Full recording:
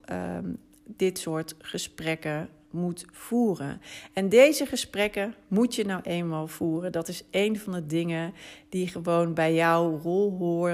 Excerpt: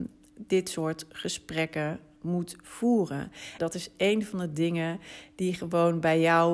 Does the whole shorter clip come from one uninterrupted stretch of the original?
no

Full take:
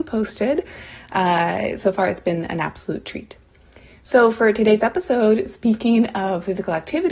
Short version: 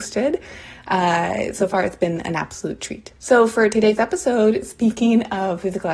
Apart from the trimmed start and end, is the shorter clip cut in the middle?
yes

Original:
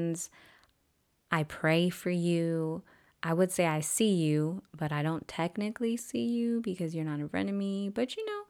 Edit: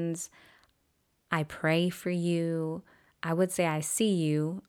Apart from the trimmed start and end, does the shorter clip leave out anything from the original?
no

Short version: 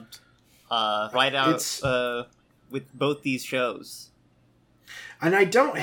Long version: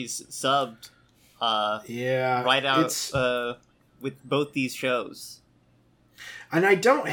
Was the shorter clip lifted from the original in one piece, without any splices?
no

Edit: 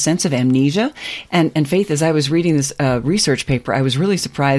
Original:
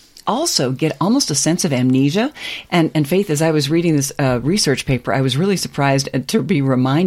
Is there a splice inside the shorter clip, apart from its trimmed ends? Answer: no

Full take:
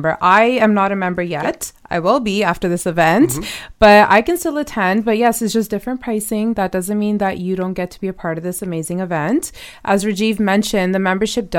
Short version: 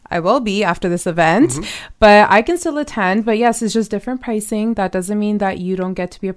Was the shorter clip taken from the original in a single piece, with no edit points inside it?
yes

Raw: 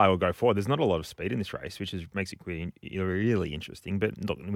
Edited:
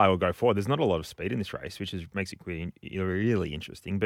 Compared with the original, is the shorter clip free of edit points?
yes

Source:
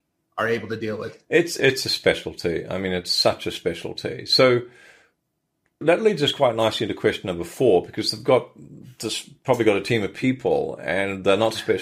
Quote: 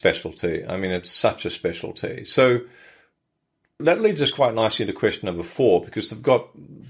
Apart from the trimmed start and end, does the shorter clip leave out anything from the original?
no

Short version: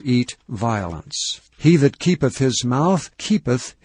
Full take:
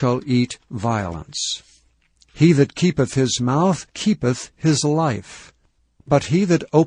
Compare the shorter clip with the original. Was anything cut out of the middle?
yes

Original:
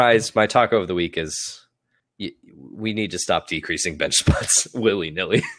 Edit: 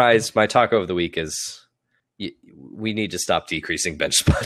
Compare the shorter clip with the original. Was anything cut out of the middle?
no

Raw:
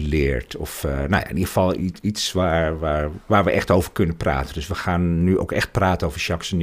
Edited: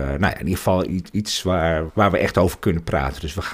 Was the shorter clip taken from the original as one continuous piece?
no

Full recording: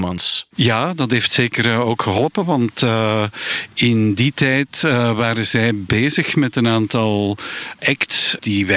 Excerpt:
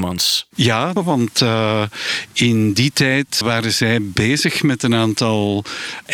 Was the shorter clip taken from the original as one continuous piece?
no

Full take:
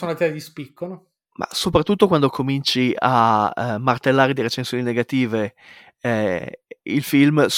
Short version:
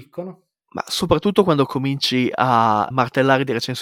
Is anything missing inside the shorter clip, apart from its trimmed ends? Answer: yes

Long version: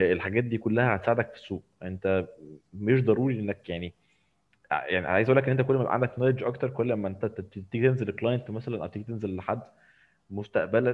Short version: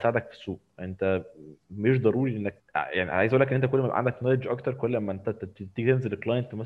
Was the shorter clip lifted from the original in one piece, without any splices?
no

